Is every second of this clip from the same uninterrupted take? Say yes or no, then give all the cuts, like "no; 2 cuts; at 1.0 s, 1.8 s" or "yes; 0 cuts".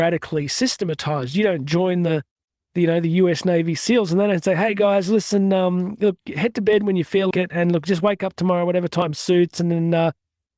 no; 1 cut; at 7.3 s